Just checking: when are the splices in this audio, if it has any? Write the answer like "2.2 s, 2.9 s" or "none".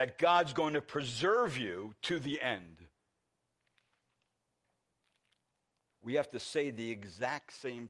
5.9 s